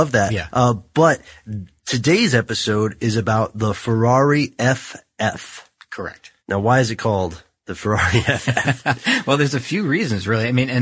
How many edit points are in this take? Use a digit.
1